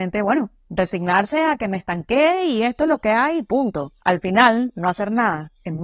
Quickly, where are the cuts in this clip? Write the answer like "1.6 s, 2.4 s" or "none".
4.0 s